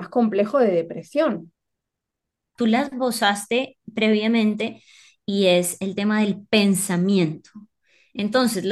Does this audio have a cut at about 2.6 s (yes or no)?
yes